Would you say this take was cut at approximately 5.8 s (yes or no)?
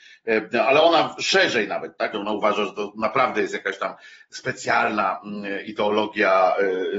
no